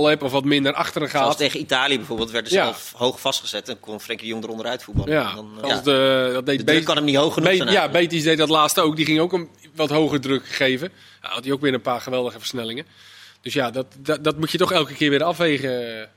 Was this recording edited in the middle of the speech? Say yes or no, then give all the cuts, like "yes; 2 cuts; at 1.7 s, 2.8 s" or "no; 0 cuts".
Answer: yes; 1 cut; at 5.6 s